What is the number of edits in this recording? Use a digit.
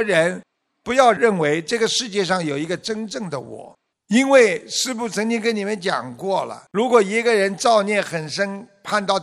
2